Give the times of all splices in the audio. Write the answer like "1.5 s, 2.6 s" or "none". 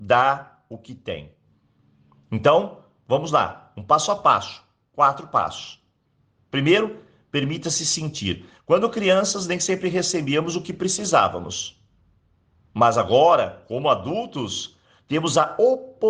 8.5 s